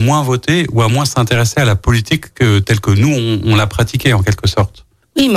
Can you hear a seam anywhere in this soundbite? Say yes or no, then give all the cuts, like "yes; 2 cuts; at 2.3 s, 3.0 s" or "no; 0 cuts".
no; 0 cuts